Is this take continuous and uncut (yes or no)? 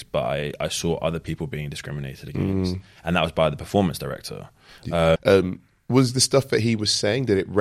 no